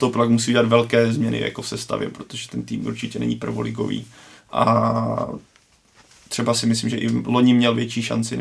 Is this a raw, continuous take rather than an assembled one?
yes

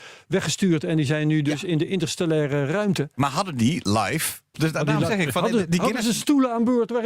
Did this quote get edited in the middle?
yes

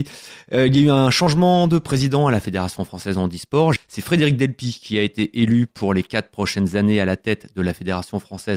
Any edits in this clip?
yes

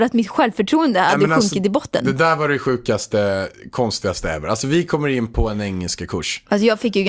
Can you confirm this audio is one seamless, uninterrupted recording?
yes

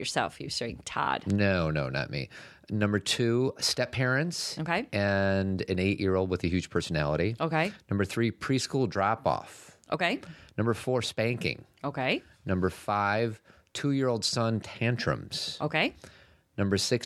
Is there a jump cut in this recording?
no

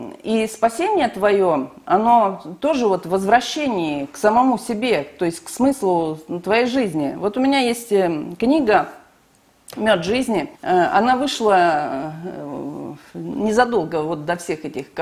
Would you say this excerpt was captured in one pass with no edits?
no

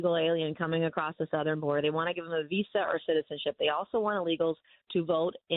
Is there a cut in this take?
no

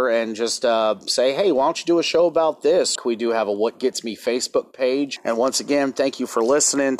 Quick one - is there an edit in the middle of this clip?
yes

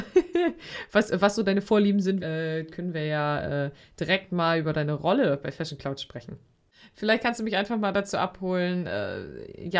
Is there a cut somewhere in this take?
yes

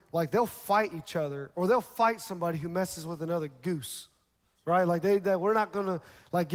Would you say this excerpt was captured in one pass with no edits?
yes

